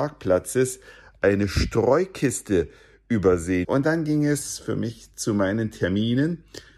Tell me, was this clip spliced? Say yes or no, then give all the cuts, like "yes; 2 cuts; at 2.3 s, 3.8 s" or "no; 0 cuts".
yes; 1 cut; at 3.6 s